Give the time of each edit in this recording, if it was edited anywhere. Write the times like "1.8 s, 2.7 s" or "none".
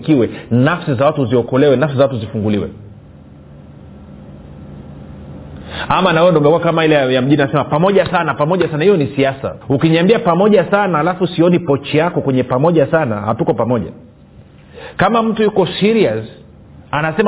9.6 s